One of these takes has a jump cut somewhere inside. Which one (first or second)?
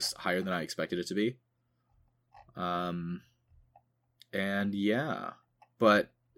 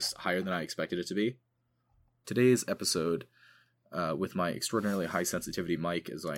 second